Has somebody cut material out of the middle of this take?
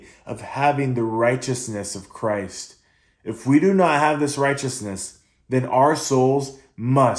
no; 0 cuts

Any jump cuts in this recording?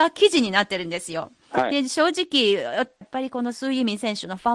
no; 0 cuts

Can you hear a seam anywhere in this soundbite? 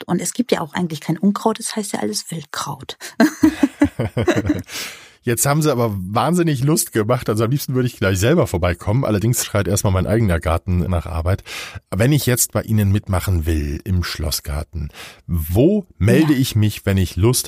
no; 0 cuts

